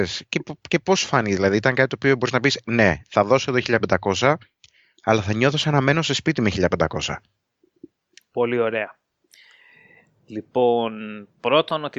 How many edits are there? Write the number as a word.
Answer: zero